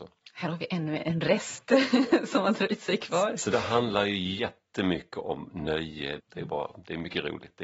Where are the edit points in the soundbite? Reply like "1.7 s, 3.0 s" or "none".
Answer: 1.0 s, 6.2 s